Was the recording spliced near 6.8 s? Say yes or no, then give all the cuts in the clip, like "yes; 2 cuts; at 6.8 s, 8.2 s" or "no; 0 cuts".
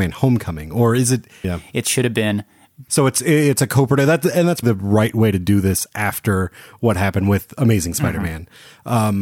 no; 3 cuts; at 1.4 s, 2.9 s, 4.6 s